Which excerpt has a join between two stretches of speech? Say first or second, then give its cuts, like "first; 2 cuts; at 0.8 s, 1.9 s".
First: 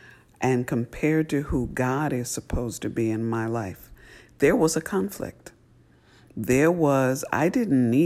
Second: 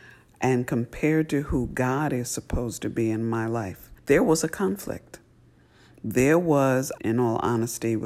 second; 2 cuts; at 4.0 s, 7.0 s